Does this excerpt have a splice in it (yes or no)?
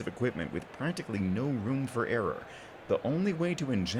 yes